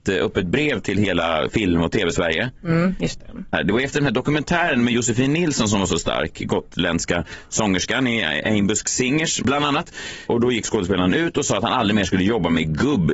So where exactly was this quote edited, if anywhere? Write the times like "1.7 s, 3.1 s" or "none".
none